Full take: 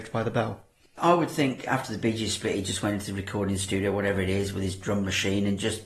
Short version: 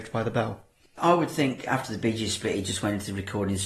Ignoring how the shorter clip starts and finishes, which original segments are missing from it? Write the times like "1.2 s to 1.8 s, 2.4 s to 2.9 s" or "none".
none